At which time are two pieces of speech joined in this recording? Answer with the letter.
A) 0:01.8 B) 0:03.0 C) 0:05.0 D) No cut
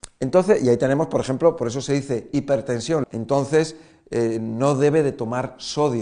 B